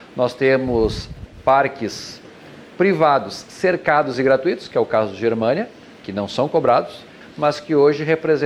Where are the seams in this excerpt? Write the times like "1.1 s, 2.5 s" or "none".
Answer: 5.9 s, 7.2 s

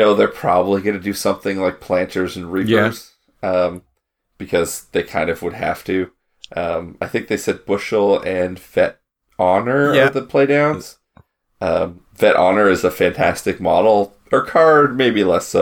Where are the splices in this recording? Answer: none

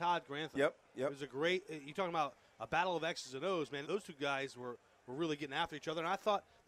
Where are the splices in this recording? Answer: 3.8 s

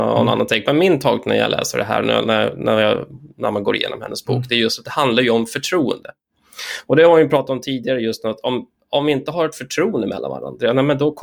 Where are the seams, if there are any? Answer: none

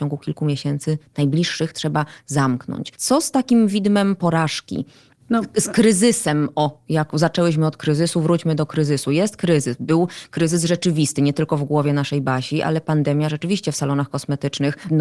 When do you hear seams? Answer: none

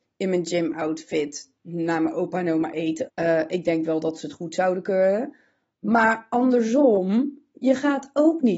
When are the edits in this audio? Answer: 3.1 s

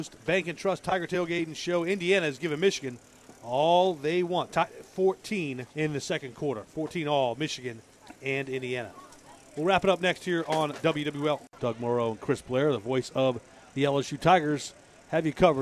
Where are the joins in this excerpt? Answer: 5.7 s, 11.6 s

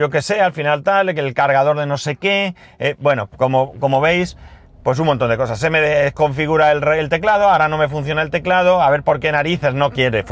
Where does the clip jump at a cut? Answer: none

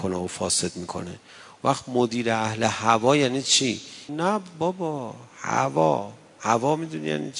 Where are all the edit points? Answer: 4.1 s

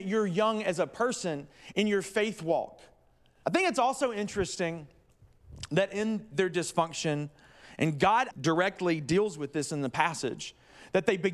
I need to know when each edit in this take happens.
1.7 s, 3.4 s, 8.3 s

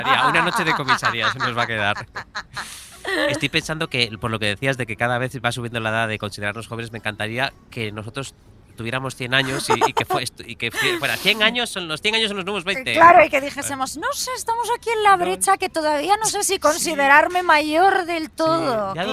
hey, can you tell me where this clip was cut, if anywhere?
none

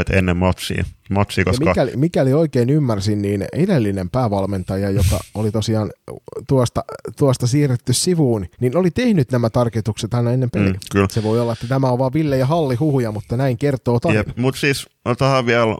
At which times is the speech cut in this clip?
8.5 s

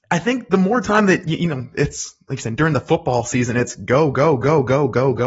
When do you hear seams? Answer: none

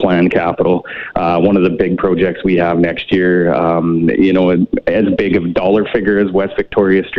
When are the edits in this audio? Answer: none

